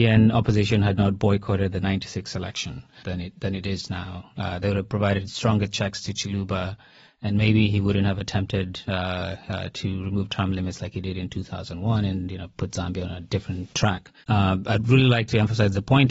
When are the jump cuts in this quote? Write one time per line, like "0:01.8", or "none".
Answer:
0:03.0